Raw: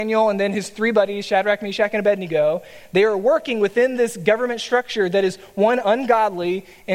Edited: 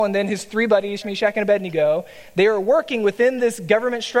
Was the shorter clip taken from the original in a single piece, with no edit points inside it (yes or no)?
no